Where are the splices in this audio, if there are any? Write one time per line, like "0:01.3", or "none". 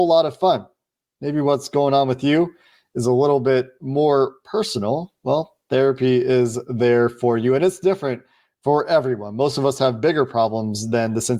none